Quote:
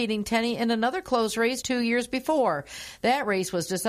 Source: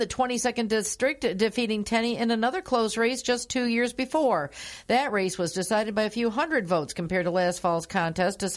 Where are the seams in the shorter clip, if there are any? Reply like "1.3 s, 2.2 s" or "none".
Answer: 1.6 s